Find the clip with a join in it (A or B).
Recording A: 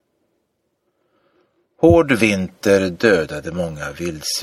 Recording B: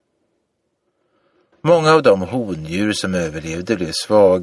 B